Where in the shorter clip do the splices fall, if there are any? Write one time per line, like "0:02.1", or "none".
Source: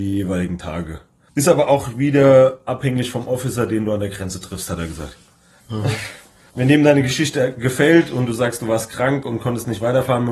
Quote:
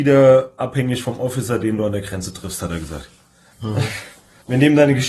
none